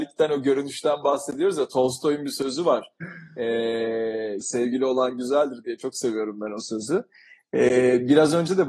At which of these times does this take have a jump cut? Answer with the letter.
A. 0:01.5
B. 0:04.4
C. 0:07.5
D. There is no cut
B